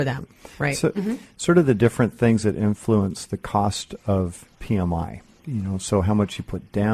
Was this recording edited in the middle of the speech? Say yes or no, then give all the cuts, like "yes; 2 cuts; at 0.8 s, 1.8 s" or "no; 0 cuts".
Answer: yes; 1 cut; at 0.9 s